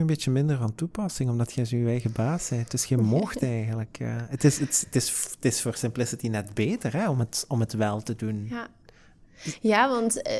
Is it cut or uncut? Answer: uncut